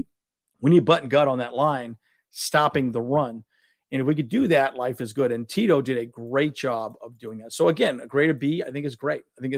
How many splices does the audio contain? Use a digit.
0